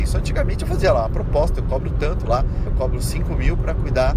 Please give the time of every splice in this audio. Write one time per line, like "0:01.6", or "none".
0:02.7